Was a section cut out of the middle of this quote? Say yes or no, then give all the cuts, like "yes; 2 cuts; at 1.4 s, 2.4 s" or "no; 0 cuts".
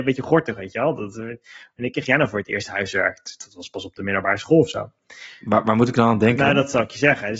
no; 0 cuts